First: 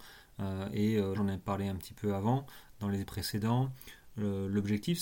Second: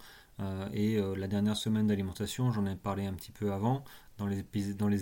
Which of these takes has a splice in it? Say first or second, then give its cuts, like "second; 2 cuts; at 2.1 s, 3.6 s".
first; 2 cuts; at 1.1 s, 3.0 s